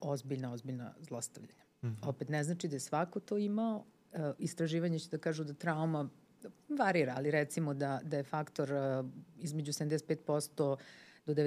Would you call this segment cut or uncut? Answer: uncut